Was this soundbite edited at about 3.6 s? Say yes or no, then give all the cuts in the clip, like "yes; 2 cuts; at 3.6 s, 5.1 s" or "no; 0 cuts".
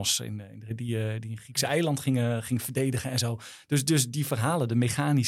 no; 0 cuts